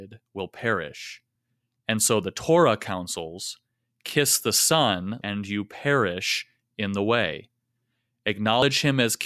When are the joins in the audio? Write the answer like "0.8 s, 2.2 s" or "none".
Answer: 5.2 s